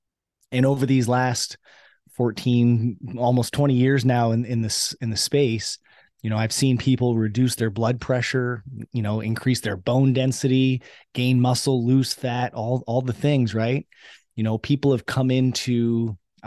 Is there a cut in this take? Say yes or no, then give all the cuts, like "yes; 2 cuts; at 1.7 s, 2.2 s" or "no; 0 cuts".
no; 0 cuts